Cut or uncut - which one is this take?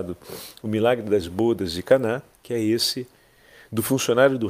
cut